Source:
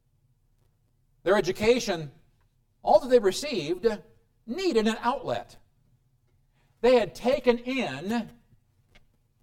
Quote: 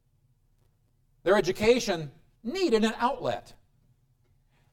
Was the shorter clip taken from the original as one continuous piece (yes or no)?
no